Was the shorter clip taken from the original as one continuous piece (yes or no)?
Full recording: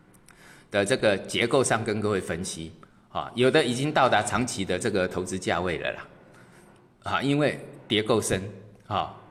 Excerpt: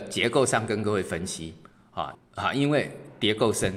no